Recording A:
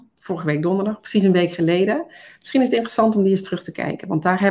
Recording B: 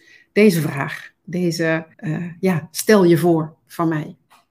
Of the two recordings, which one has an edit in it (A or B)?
B